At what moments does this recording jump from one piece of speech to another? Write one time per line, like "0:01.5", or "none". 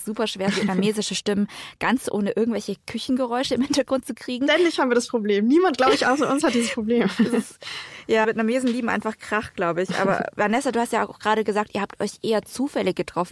0:08.2